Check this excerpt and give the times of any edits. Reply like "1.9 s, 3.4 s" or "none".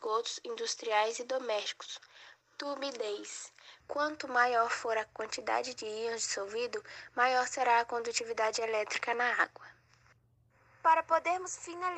2.4 s, 3.8 s